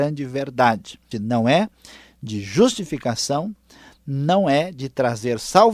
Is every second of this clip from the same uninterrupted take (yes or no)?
no